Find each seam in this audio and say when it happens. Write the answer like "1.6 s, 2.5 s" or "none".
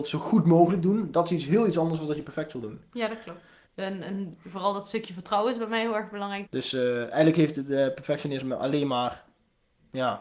3.7 s, 6.5 s